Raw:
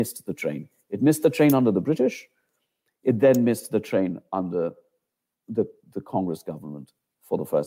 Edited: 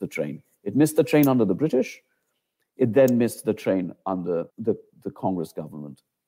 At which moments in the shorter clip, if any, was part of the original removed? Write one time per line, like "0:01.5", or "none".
0:04.5